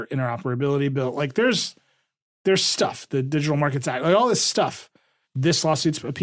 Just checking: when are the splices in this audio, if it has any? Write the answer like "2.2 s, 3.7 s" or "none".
5.2 s